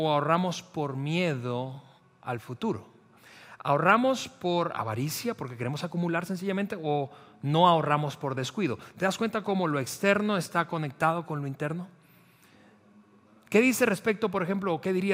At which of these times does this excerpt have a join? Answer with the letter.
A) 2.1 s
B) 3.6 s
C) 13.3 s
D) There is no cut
D